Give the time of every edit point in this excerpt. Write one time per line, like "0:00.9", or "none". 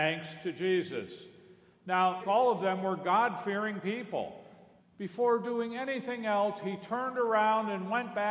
0:02.2
0:04.8